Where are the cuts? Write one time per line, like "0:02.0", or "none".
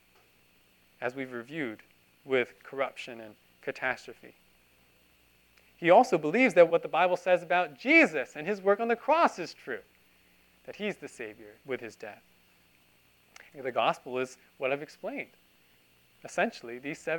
0:06.7
0:11.6
0:13.5